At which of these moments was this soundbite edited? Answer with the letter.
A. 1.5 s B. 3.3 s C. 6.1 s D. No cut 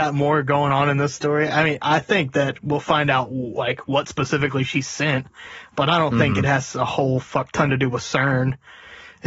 D